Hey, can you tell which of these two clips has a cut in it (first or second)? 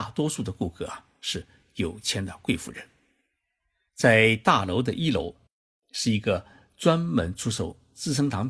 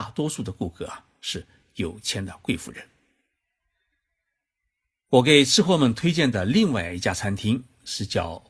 first